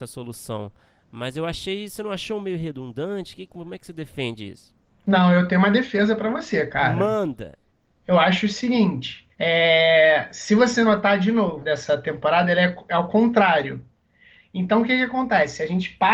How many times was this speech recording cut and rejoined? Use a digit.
2